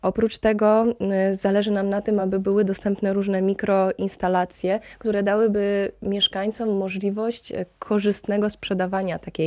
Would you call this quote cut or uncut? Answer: uncut